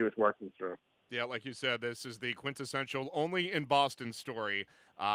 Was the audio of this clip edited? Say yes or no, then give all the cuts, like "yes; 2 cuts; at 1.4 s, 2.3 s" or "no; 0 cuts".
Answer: no; 0 cuts